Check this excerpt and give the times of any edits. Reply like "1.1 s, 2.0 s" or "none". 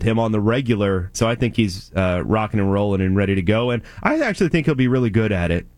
1.1 s